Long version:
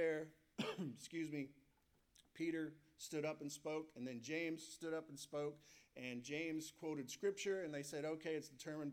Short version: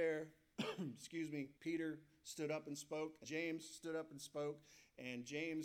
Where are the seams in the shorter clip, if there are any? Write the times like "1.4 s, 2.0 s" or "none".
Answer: 1.6 s, 3.2 s